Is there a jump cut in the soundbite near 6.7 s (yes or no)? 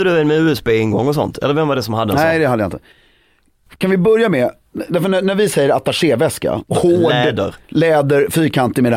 yes